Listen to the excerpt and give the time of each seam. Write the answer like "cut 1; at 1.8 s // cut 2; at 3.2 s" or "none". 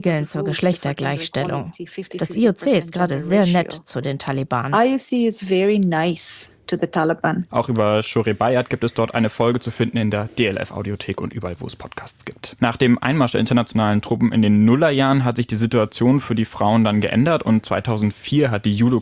cut 1; at 7.5 s // cut 2; at 12.6 s